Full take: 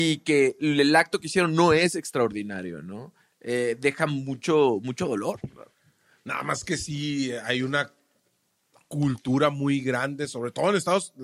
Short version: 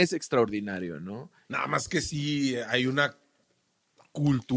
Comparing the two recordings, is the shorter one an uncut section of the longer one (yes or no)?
no